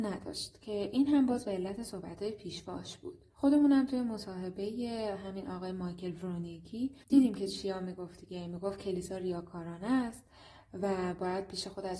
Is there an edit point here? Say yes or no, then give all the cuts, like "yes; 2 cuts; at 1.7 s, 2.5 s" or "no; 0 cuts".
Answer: yes; 2 cuts; at 3.3 s, 7.0 s